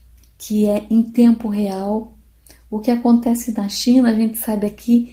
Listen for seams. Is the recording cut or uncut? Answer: uncut